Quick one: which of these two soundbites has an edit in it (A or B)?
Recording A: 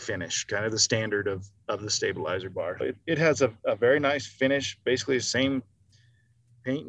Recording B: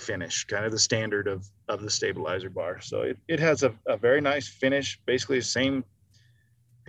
A